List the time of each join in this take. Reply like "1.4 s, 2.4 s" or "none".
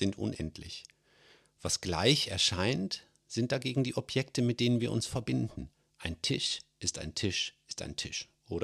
none